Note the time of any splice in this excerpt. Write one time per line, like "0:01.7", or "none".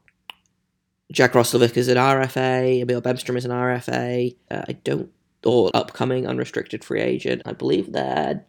0:04.5
0:05.7
0:07.4